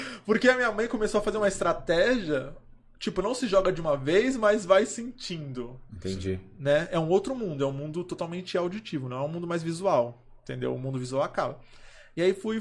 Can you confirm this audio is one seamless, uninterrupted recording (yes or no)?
yes